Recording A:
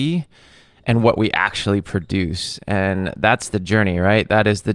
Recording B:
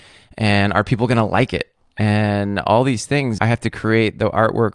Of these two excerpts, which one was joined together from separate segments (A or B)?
B